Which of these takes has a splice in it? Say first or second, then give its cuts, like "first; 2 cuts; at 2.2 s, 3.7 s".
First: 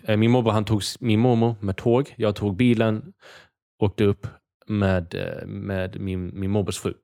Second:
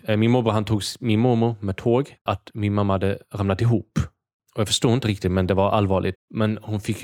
second; 2 cuts; at 2.2 s, 6.1 s